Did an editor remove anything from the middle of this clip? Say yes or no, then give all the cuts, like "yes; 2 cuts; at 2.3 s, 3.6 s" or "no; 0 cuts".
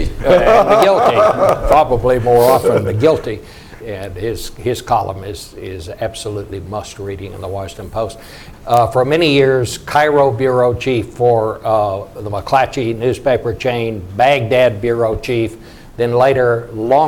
yes; 2 cuts; at 3.8 s, 8.5 s